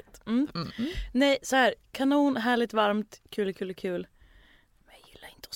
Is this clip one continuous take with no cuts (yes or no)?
yes